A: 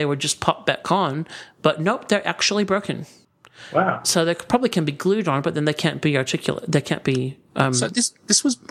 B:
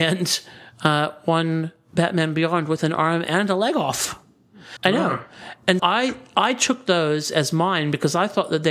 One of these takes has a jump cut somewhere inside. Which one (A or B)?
B